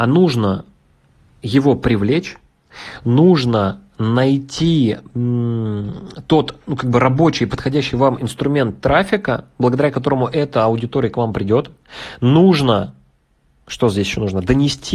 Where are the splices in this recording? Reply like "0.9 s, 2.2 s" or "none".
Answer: none